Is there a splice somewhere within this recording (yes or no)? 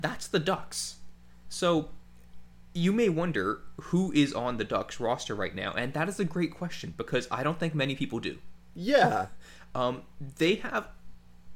no